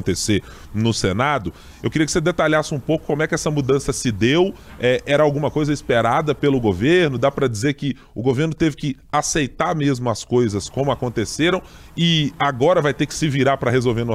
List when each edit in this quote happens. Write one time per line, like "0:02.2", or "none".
none